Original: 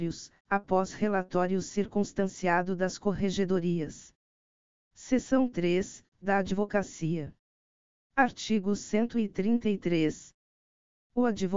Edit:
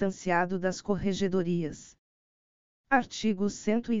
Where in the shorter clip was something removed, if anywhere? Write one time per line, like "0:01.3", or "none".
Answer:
0:02.7